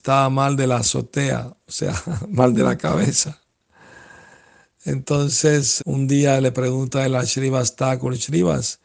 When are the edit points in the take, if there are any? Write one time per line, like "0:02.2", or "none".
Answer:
0:05.8